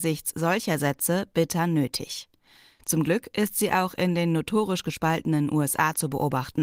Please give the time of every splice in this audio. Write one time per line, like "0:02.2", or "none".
none